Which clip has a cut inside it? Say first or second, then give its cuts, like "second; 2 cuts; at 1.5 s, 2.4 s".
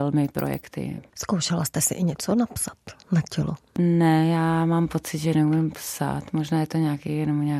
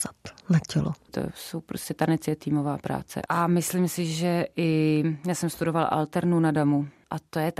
second; 1 cut; at 1.1 s